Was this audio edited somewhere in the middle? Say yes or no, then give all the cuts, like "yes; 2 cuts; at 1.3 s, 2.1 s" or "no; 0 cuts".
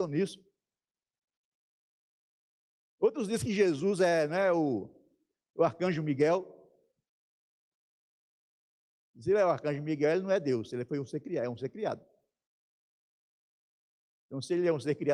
no; 0 cuts